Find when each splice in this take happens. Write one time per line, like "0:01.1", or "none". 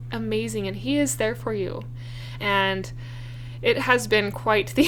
0:02.4